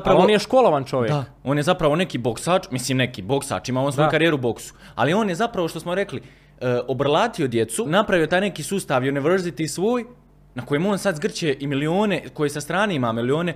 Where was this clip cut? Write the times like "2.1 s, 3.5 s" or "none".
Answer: 7.9 s

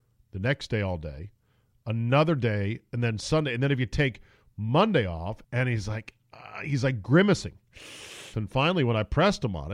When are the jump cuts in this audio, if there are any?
5.4 s, 8.3 s

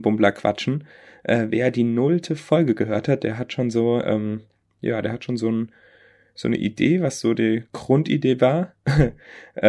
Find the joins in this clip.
none

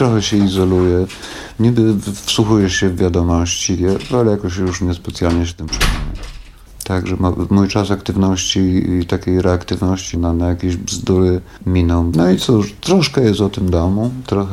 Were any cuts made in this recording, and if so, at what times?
10.1 s, 12.1 s

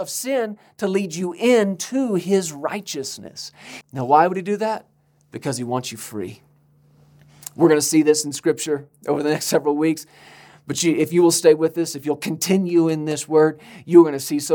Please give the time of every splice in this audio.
3.8 s

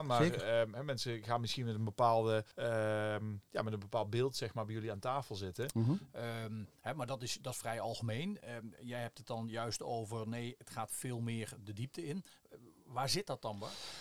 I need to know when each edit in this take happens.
2.5 s, 5.7 s

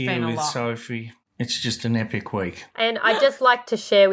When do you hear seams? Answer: 2.7 s

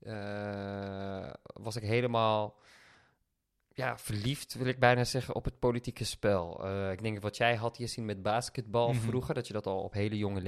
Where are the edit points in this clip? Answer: none

